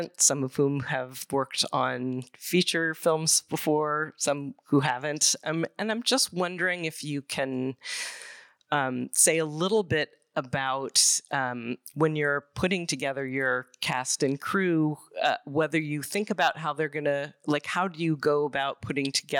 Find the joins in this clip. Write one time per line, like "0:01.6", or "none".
none